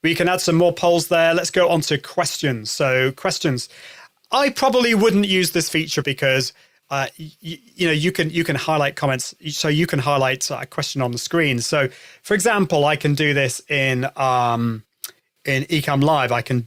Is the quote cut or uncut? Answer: cut